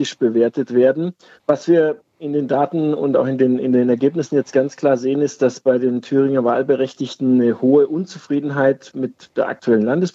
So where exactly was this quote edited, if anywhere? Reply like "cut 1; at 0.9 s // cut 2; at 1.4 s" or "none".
cut 1; at 1.4 s

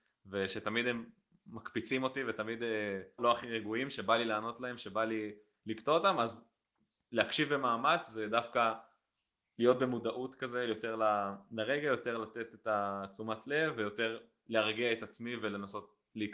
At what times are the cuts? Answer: cut 1; at 3.2 s

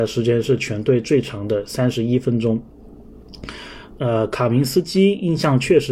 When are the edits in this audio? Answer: cut 1; at 4.0 s

